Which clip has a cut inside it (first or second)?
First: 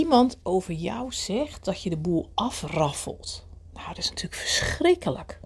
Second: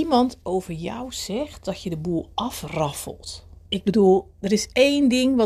second